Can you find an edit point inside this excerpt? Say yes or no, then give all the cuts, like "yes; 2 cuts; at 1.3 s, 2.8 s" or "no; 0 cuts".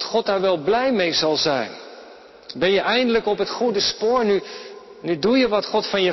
no; 0 cuts